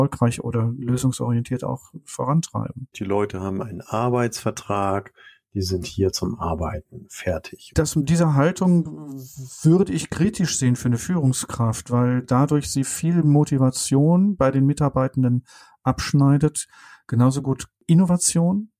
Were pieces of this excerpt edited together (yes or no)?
yes